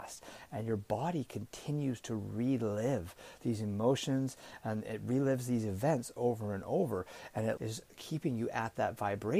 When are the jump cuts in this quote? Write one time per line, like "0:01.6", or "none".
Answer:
0:07.6